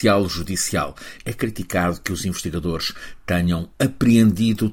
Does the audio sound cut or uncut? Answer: cut